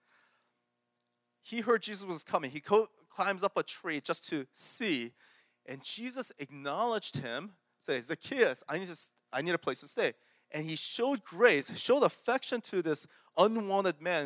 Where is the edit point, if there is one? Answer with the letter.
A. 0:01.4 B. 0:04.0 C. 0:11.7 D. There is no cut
D